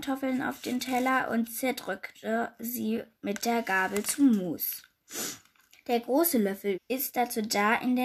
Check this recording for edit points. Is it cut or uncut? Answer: cut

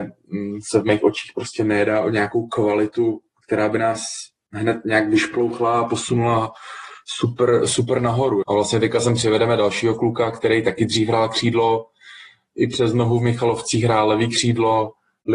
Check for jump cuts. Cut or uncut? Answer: cut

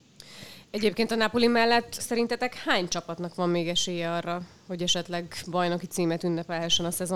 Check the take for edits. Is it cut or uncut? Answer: cut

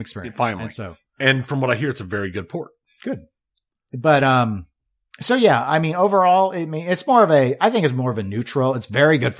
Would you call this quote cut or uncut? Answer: uncut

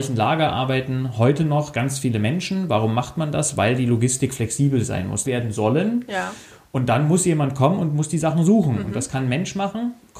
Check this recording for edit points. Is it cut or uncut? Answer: cut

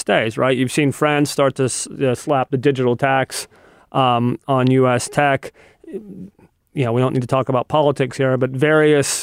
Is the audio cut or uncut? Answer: uncut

